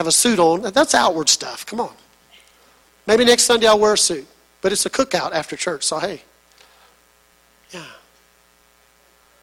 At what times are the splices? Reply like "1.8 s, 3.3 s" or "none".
none

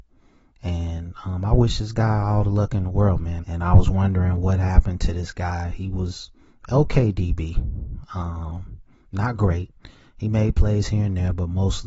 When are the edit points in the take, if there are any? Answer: 3.4 s

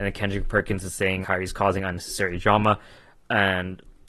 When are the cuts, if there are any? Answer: 1.2 s

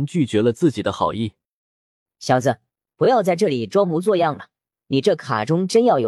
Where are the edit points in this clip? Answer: none

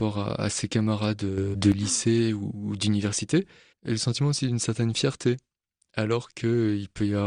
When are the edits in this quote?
none

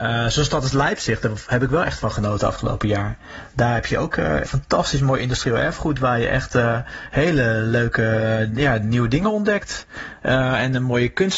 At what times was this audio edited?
4.4 s

